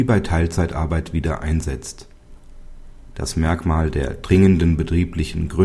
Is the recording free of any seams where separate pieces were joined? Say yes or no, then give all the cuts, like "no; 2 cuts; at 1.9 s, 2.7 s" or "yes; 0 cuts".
yes; 0 cuts